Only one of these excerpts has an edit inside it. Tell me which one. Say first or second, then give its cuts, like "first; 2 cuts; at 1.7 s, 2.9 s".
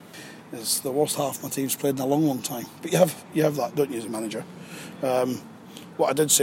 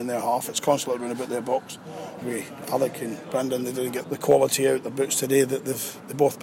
second; 2 cuts; at 2.2 s, 4.0 s